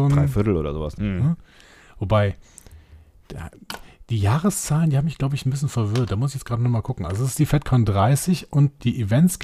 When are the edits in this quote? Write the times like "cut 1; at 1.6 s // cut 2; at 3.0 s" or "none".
cut 1; at 1.0 s